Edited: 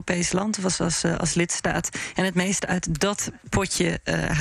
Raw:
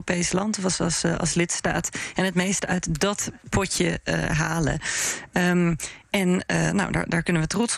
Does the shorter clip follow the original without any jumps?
yes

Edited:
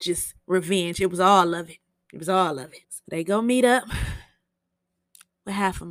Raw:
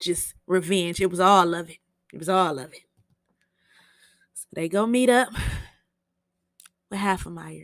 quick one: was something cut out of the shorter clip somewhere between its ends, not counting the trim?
yes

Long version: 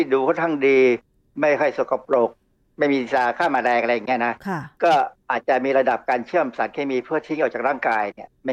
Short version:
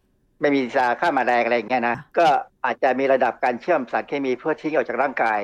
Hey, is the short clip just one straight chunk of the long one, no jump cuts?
no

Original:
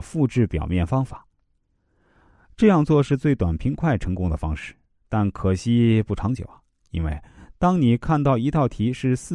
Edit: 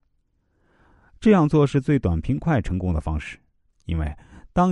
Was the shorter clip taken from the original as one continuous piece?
no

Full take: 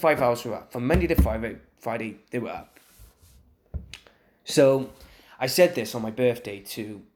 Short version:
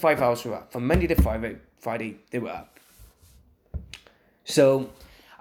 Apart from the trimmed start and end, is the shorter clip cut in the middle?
no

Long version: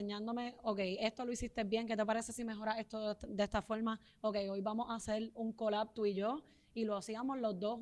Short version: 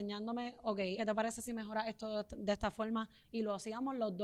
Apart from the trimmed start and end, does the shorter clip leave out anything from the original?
yes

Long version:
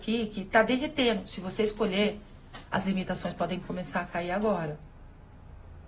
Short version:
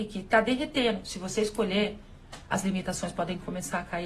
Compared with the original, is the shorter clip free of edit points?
yes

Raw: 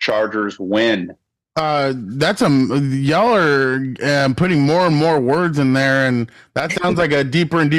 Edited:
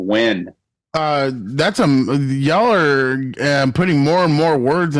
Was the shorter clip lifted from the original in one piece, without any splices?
yes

